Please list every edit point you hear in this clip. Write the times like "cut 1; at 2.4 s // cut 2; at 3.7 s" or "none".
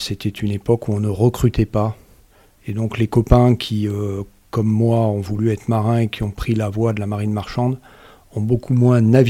none

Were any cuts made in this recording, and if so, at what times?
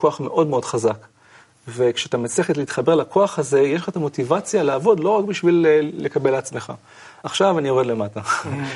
none

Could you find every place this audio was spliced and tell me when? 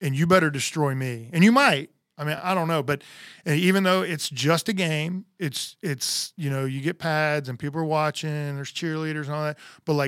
none

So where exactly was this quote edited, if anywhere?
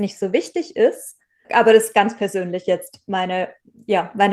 cut 1; at 1.4 s

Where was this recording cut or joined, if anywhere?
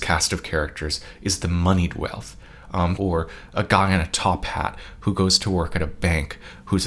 cut 1; at 3.0 s

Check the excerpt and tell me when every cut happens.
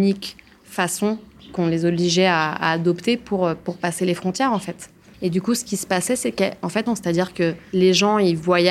cut 1; at 5.1 s // cut 2; at 6.9 s

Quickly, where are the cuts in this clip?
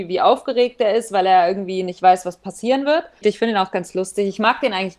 cut 1; at 3.2 s

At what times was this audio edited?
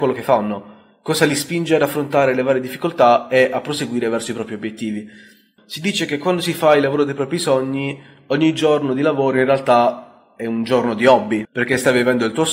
cut 1; at 5.6 s // cut 2; at 11.4 s

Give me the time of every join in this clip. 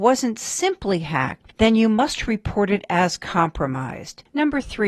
cut 1; at 1.5 s

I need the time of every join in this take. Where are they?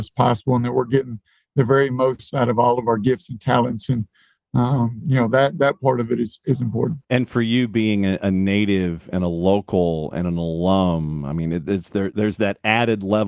cut 1; at 7.0 s

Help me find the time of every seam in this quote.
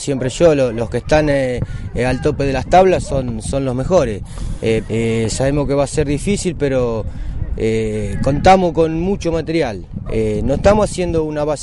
cut 1; at 4.9 s // cut 2; at 10.1 s

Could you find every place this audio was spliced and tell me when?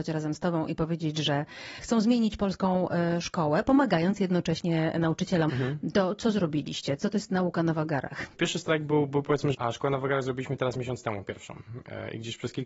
cut 1; at 5.5 s // cut 2; at 9.5 s

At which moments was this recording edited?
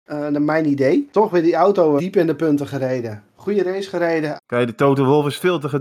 cut 1; at 2.0 s // cut 2; at 4.4 s

